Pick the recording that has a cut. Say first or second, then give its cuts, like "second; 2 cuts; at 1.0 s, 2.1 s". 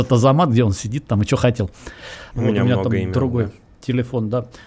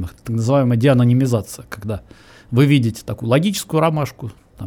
first; 1 cut; at 2.3 s